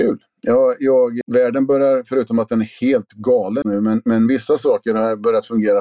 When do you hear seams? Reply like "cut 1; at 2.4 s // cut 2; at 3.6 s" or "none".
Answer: cut 1; at 1.2 s // cut 2; at 3.6 s